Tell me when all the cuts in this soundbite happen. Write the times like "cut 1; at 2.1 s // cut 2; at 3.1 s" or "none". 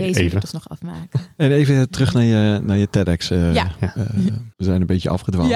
cut 1; at 4.5 s